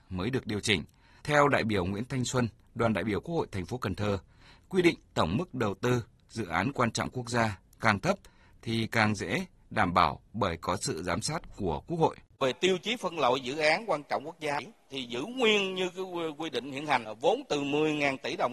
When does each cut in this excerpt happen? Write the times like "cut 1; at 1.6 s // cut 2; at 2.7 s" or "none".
cut 1; at 1.2 s

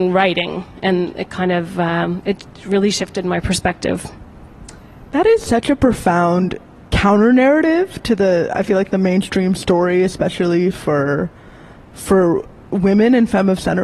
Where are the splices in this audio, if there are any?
none

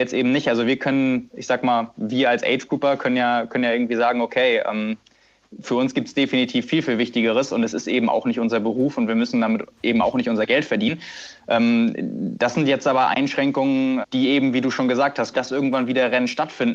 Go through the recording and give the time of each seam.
cut 1; at 14.0 s // cut 2; at 15.3 s

